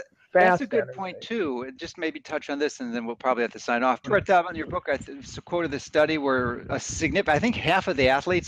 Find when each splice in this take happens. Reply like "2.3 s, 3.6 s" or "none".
4.0 s, 6.7 s